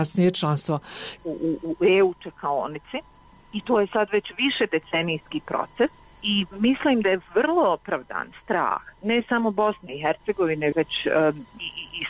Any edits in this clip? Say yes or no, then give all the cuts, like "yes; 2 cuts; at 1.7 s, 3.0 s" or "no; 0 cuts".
yes; 2 cuts; at 1.2 s, 10.7 s